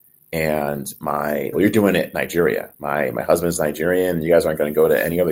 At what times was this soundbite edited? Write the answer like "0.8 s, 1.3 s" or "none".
1.5 s